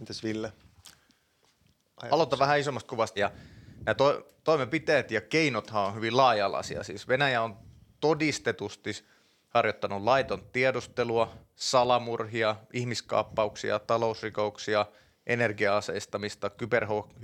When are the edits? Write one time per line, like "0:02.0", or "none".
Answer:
0:03.2